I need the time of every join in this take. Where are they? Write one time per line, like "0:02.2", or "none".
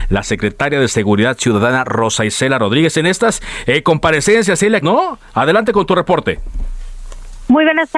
0:04.8

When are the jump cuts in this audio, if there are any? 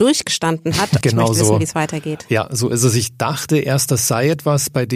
0:01.0

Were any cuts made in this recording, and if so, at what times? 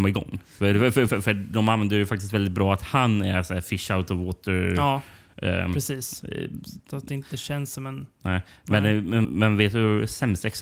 0:01.1
0:09.2

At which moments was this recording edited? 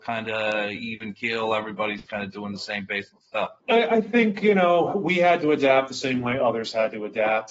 0:03.6

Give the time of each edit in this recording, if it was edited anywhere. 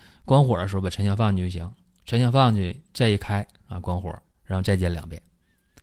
0:04.3

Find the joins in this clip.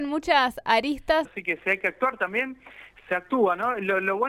0:01.3

